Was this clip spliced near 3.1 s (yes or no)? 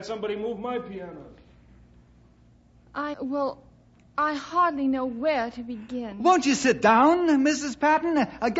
yes